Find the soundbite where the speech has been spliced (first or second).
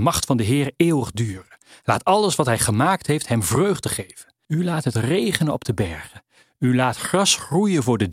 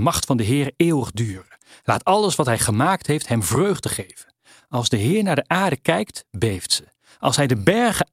first